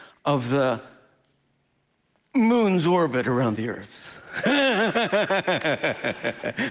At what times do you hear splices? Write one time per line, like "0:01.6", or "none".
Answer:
none